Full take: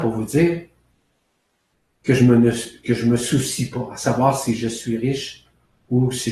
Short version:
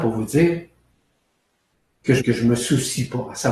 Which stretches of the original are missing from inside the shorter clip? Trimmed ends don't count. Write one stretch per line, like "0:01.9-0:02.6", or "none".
0:02.2-0:02.8